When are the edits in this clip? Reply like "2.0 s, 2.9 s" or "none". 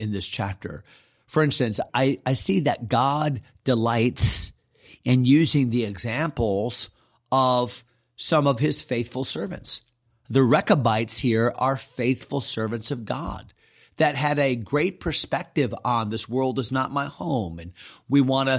1.9 s